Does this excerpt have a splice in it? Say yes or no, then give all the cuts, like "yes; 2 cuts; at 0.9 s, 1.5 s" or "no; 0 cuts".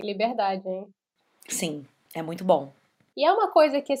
no; 0 cuts